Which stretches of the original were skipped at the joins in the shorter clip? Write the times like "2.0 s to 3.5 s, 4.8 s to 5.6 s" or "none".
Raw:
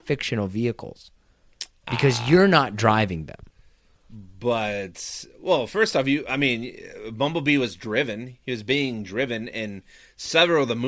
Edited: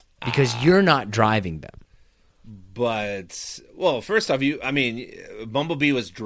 none